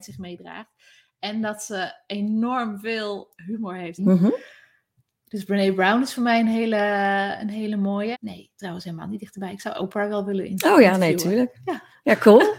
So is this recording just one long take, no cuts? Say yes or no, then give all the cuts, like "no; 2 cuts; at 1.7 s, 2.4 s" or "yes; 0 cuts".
no; 2 cuts; at 4.0 s, 8.1 s